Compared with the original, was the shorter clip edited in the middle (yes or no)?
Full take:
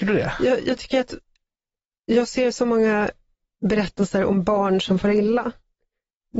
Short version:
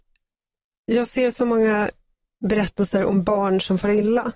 no